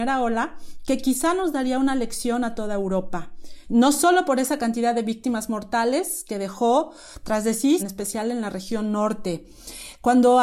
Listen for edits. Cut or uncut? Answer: cut